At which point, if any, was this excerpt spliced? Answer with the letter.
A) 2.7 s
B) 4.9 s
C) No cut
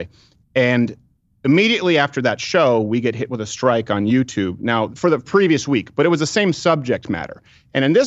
B